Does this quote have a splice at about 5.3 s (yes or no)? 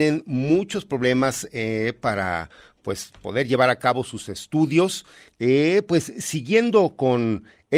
yes